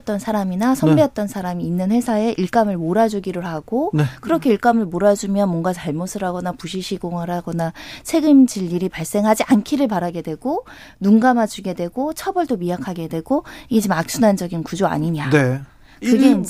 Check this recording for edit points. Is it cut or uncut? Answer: uncut